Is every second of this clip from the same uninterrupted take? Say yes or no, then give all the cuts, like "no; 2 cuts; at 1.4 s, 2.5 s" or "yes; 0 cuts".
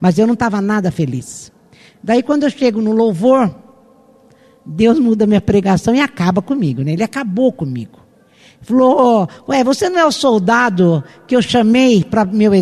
yes; 0 cuts